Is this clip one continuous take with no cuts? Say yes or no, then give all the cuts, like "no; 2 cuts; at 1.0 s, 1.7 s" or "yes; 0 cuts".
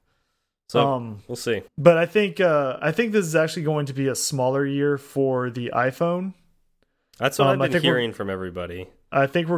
no; 1 cut; at 1.7 s